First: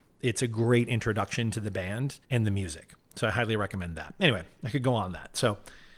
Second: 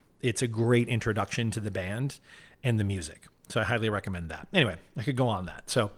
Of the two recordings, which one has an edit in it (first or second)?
first